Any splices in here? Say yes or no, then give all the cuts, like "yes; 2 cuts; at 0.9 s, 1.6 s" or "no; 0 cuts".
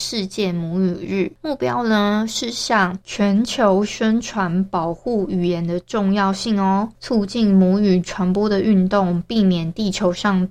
no; 0 cuts